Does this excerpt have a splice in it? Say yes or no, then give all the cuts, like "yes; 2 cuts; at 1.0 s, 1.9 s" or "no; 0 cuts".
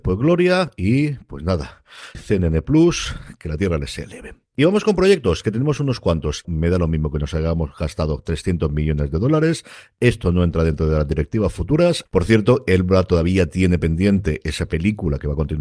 yes; 3 cuts; at 2.1 s, 6.4 s, 12.1 s